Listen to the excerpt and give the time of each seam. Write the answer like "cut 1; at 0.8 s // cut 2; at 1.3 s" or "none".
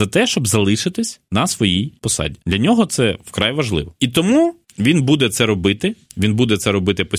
cut 1; at 4.0 s

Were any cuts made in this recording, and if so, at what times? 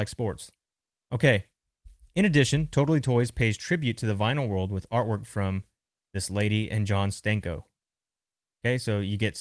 none

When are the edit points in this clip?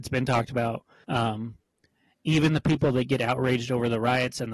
cut 1; at 1.0 s

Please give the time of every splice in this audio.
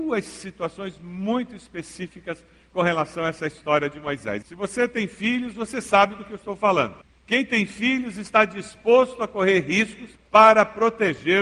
cut 1; at 4.4 s

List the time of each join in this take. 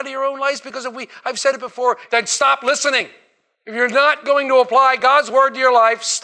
cut 1; at 2.1 s

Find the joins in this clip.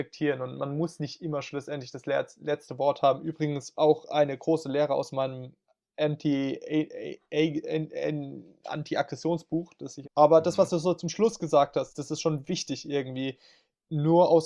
cut 1; at 10.0 s // cut 2; at 11.9 s

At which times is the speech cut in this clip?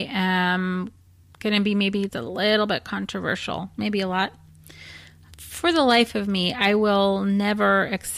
cut 1; at 2.1 s

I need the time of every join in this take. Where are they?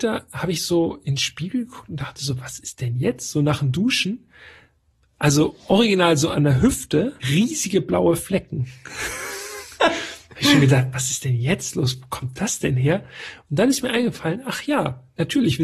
cut 1; at 7.2 s

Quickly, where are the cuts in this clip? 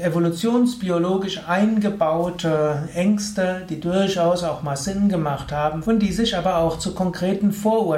cut 1; at 5.8 s

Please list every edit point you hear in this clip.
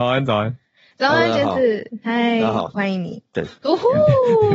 cut 1; at 3.3 s

